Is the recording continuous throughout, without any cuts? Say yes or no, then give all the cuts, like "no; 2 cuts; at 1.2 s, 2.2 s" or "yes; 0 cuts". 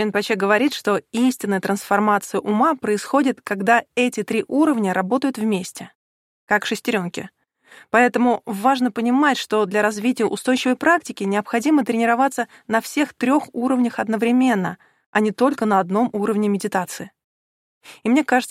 yes; 0 cuts